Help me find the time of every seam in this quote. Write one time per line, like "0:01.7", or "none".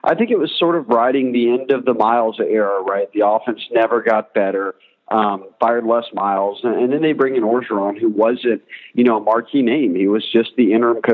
0:05.5

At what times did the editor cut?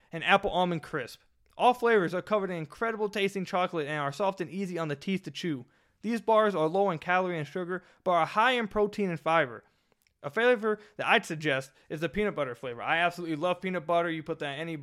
none

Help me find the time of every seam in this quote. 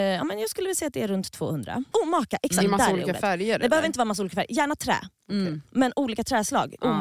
0:01.9

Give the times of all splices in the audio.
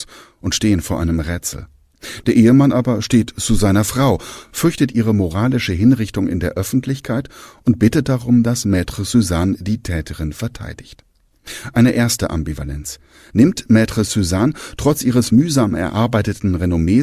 none

